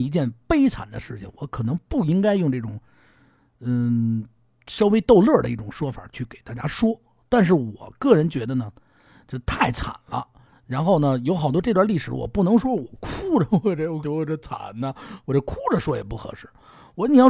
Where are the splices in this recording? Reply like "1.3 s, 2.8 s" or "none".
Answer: 14.0 s